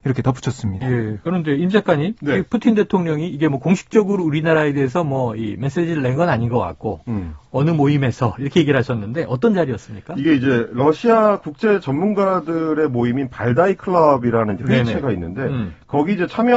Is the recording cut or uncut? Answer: uncut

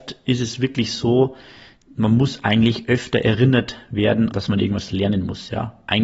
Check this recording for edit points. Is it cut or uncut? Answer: cut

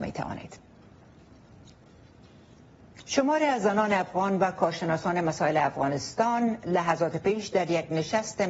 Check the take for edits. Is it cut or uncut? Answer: cut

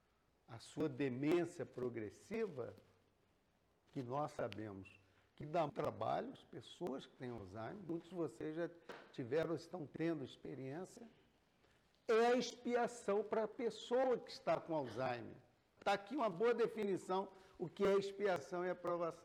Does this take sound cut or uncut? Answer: cut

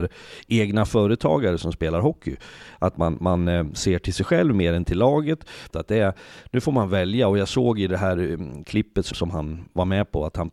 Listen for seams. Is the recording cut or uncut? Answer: cut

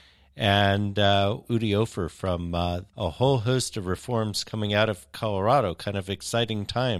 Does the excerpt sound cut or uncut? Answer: cut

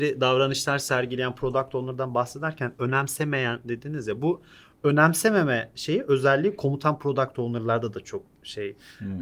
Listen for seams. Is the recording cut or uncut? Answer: uncut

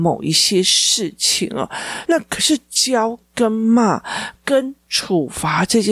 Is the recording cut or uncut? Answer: cut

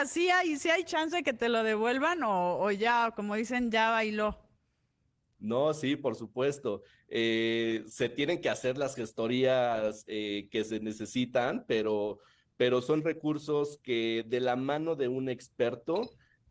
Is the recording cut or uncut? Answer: uncut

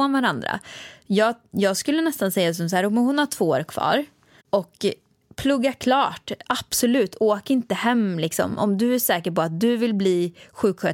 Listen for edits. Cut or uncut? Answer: cut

